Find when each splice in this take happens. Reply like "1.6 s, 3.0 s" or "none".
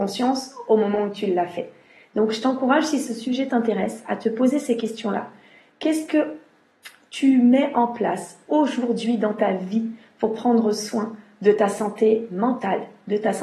none

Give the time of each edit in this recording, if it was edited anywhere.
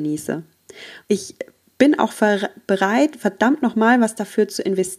1.0 s

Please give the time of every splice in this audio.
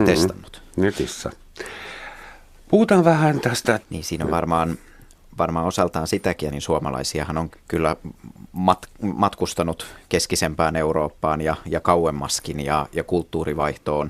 3.8 s, 6.5 s, 7.5 s

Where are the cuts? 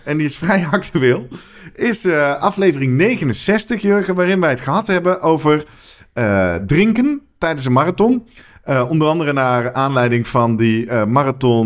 none

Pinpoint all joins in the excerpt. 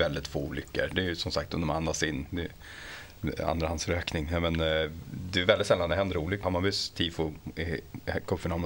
6.4 s

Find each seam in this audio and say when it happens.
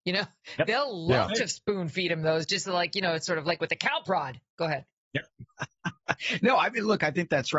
none

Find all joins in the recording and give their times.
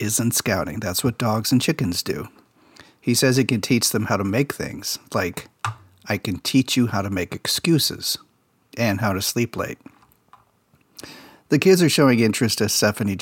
none

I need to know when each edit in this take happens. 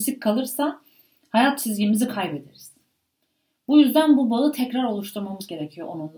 none

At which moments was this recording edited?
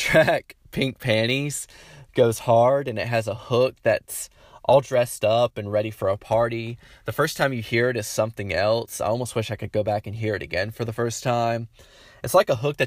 none

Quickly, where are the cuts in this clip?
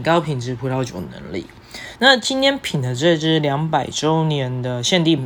none

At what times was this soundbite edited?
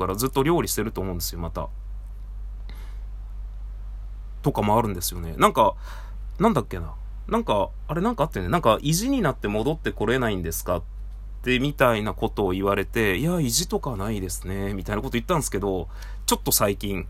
none

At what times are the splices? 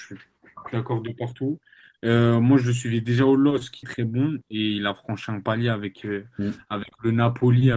3.8 s

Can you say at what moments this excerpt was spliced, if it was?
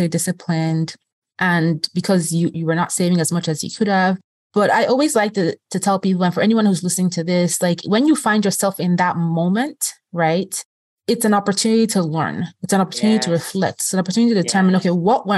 2.5 s

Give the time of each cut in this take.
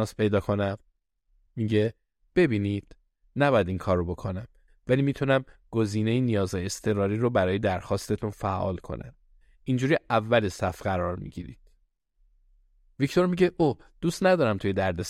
1.5 s

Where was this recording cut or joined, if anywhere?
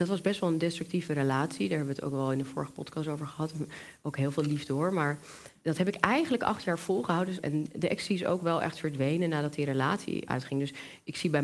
5.6 s, 7.4 s, 10.3 s

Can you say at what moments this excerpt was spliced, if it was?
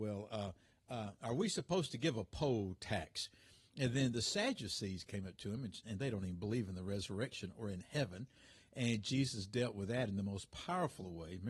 3.7 s, 5.8 s

